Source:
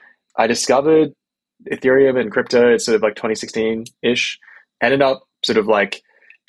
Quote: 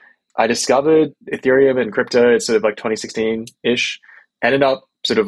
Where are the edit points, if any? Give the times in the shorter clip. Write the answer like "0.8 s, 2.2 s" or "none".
1.2 s